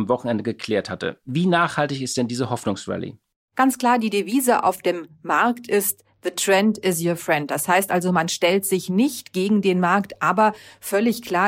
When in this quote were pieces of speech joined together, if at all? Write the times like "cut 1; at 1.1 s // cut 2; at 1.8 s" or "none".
none